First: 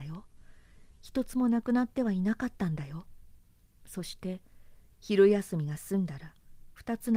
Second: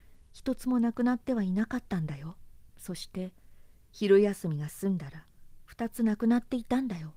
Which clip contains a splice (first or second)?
second